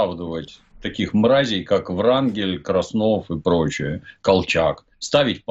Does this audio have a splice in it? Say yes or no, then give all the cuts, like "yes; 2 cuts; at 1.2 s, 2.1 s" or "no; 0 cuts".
no; 0 cuts